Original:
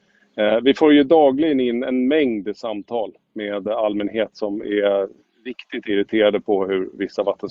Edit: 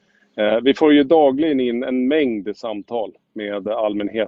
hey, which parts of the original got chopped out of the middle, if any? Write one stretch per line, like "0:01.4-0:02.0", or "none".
none